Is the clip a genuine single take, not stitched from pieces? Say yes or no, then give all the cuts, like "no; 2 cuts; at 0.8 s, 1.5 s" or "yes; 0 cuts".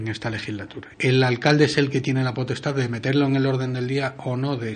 no; 1 cut; at 0.9 s